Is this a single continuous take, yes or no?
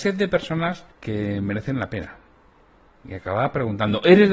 no